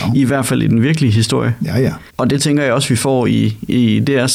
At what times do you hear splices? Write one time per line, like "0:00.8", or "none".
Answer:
0:02.1